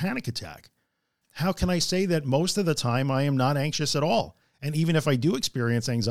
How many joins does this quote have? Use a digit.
1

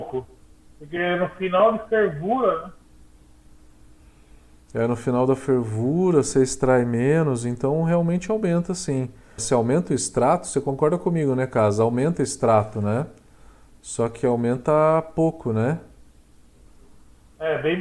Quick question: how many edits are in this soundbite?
1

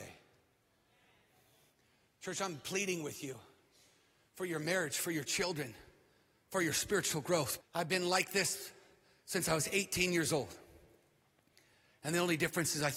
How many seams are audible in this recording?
1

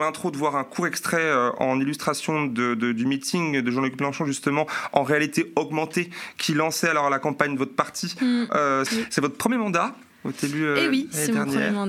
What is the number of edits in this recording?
1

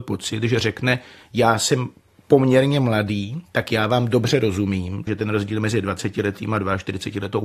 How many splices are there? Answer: 1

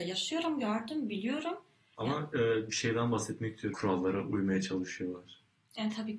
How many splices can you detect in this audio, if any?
2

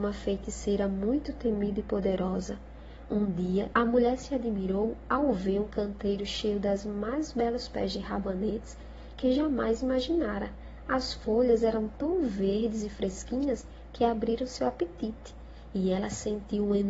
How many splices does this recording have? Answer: 1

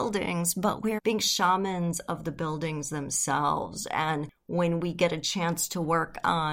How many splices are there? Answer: 1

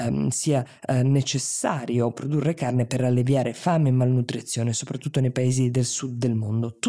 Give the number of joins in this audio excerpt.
0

